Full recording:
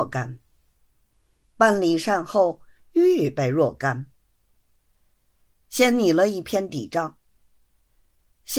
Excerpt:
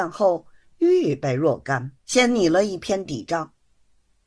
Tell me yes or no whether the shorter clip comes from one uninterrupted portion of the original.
no